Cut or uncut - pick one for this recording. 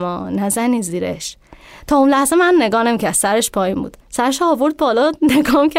cut